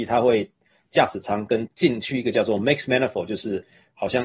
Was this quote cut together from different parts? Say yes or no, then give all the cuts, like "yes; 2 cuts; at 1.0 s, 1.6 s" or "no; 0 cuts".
yes; 1 cut; at 1.7 s